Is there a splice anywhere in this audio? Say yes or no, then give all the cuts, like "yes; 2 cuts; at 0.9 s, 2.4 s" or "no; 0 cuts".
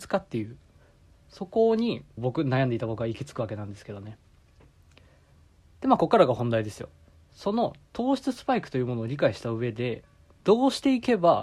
yes; 1 cut; at 2.2 s